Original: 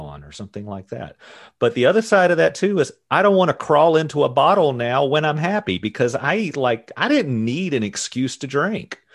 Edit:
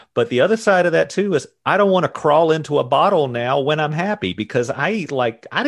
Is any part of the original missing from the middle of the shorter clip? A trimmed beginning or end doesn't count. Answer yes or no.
no